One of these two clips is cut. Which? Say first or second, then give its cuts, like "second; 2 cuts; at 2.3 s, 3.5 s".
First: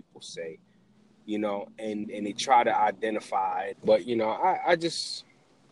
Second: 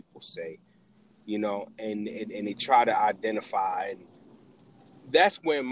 first; 2 cuts; at 2.0 s, 3.7 s